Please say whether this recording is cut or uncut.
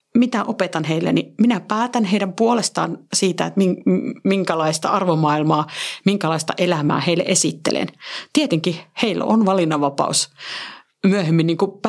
uncut